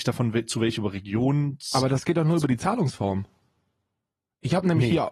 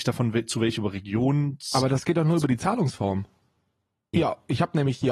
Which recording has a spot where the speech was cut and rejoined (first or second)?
second